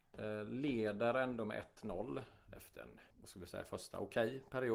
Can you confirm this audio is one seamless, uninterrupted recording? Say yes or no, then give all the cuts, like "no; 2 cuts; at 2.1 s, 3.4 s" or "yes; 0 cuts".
no; 1 cut; at 3.1 s